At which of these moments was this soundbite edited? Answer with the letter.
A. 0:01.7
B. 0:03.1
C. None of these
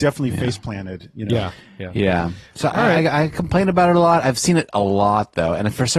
C